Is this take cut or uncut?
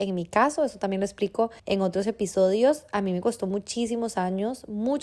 cut